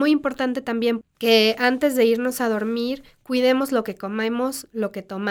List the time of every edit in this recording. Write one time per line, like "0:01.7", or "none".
0:01.0